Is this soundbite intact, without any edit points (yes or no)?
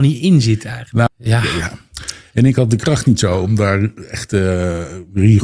no